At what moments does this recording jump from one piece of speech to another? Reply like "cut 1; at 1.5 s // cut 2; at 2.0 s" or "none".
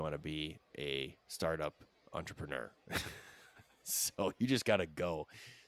none